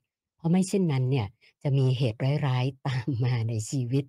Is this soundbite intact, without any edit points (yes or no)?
yes